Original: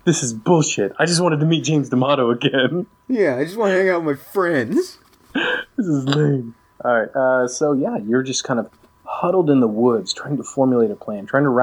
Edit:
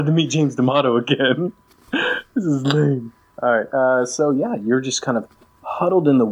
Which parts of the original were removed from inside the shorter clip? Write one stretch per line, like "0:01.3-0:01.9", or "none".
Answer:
0:03.0-0:05.1